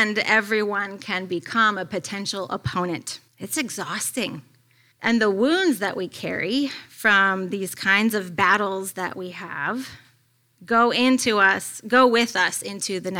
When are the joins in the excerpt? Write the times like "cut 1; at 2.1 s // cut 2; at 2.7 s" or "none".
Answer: cut 1; at 3.3 s // cut 2; at 4.9 s